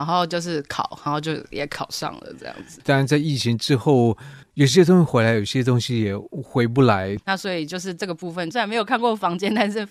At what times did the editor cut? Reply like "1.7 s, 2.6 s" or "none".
2.8 s, 7.2 s, 8.5 s